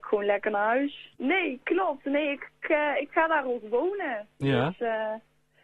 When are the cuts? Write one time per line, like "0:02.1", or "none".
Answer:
0:01.1